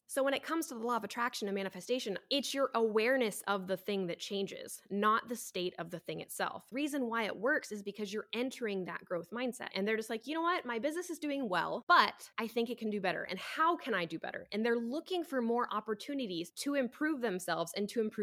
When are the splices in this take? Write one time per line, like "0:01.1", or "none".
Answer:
0:09.7